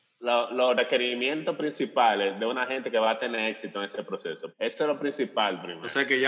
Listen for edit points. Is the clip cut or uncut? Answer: cut